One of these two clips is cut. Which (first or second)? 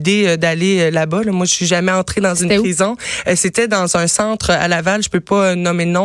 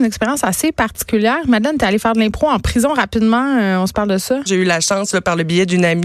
second